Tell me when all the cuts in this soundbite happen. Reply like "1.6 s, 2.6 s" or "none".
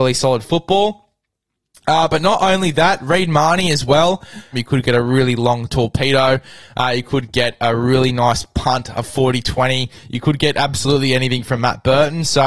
4.5 s